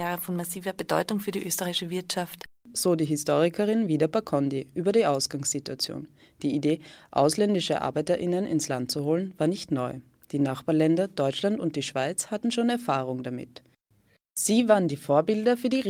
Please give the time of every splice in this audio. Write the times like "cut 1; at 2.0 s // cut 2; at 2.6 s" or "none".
none